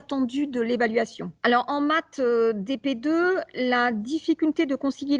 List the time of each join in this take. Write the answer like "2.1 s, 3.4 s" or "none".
1.4 s